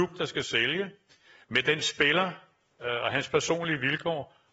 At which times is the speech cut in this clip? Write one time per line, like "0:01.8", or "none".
none